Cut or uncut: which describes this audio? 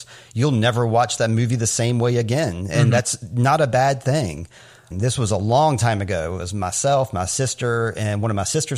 cut